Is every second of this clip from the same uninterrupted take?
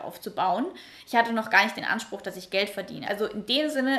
no; 1 cut; at 3.0 s

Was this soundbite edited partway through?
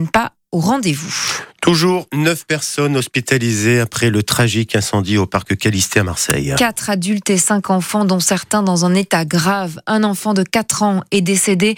no; 0 cuts

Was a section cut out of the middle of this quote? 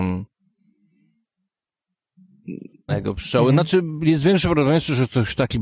yes; 1 cut; at 2.9 s

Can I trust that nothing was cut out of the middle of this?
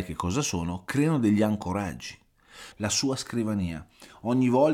no; 1 cut; at 2.7 s

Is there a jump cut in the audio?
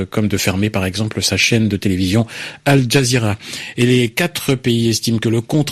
no; 0 cuts

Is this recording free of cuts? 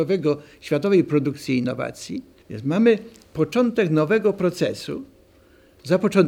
no; 1 cut; at 2.4 s

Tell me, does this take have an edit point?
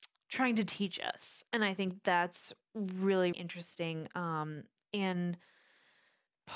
yes; 1 cut; at 3.3 s

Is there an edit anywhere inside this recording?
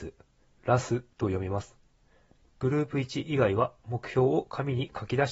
yes; 1 cut; at 2.4 s

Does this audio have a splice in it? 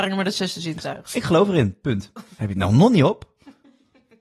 no; 0 cuts

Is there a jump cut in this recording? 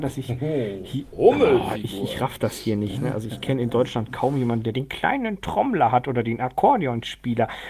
no; 0 cuts

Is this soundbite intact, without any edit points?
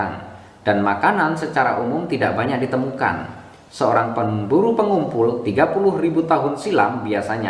yes; 0 cuts

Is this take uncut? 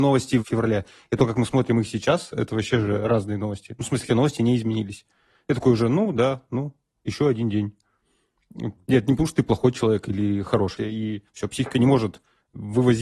no; 3 cuts; at 4.0 s, 8.8 s, 10.8 s

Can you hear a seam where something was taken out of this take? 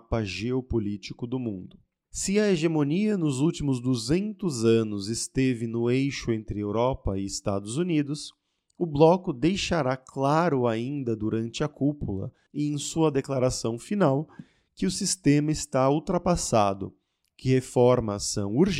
yes; 1 cut; at 2.0 s

